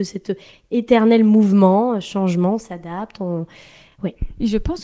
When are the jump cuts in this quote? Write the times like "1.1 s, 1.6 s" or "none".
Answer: none